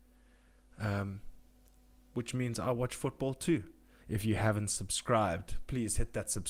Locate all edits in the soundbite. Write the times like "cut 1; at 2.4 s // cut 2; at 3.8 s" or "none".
cut 1; at 2.0 s // cut 2; at 4.0 s